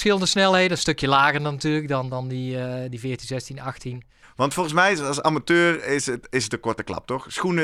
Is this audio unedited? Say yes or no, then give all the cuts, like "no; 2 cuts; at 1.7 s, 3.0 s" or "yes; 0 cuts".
no; 1 cut; at 4.2 s